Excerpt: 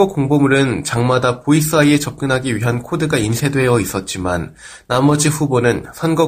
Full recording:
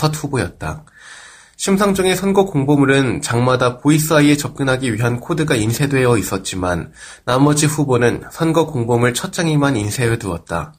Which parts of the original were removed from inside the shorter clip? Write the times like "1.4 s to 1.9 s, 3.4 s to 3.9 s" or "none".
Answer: none